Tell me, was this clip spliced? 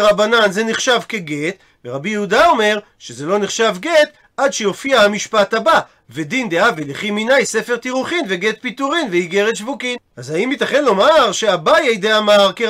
no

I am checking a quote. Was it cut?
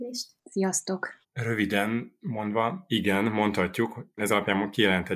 yes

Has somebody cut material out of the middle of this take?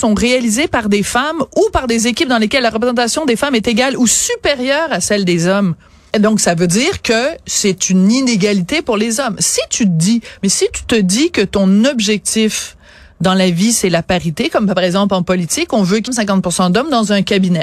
yes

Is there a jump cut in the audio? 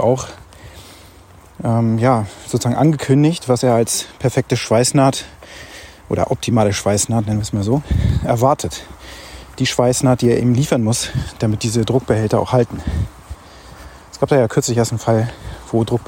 no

